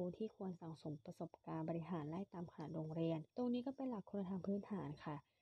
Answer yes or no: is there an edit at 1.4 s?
no